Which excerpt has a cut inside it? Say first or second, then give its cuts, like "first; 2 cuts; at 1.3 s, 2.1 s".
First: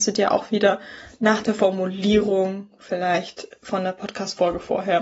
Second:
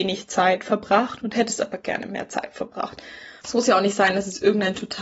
second; 1 cut; at 3.4 s